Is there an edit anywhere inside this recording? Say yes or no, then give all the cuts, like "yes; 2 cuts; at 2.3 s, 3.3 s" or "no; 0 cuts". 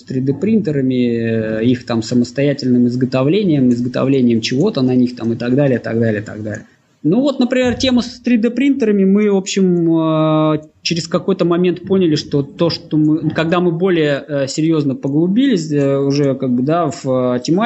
no; 0 cuts